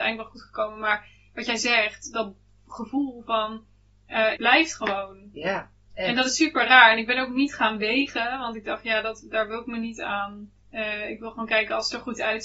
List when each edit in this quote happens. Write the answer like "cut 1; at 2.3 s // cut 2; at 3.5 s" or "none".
cut 1; at 4.4 s // cut 2; at 10.6 s